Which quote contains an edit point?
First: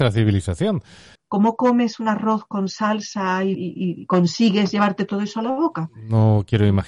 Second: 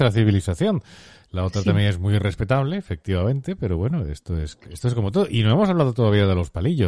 first; 2 cuts; at 1.2 s, 3.5 s

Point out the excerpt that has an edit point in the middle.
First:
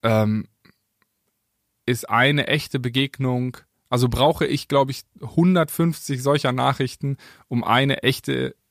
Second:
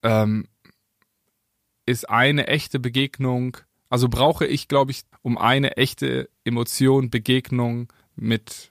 second; 1 cut; at 5.1 s

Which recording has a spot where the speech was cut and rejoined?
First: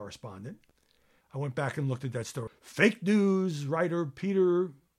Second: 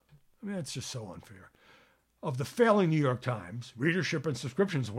first; 2 cuts; at 1.2 s, 2.5 s

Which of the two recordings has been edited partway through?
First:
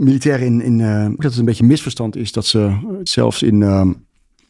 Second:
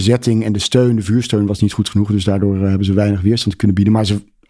first; 2 cuts; at 1.2 s, 3.1 s

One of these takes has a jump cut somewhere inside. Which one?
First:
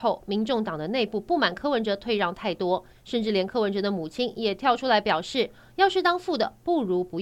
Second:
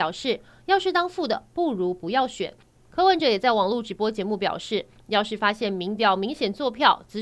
second; 1 cut; at 2.9 s

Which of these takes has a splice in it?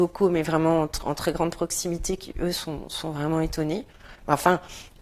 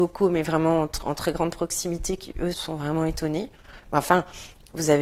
second; 1 cut; at 2.5 s

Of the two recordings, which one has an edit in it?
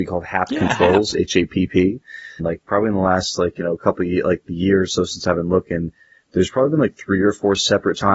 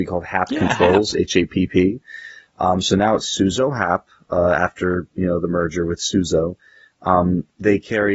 first; 1 cut; at 2.4 s

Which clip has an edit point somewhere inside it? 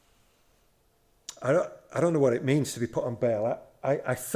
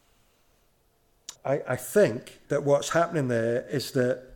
second; 2 cuts; at 1.3 s, 2.4 s

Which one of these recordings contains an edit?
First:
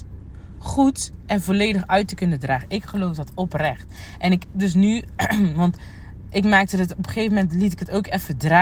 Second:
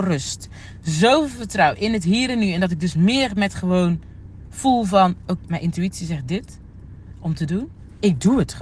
second; 1 cut; at 5.4 s

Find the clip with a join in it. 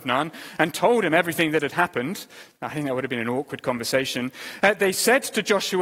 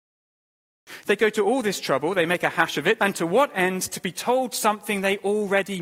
second; 1 cut; at 3.0 s

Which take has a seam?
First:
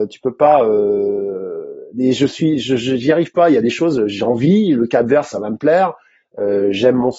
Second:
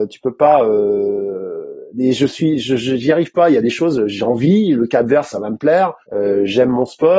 second; 1 cut; at 6.0 s

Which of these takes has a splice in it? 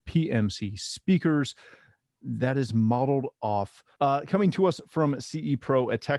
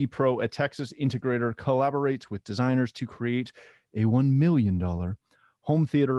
first; 1 cut; at 3.9 s

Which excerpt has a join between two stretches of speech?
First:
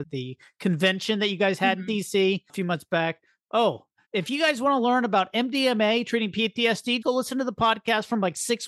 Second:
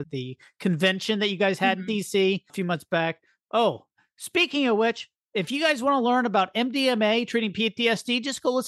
first; 2 cuts; at 4.1 s, 7.0 s

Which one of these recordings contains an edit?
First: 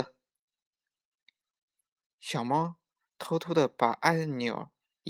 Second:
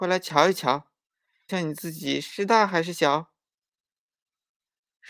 second; 1 cut; at 1.5 s

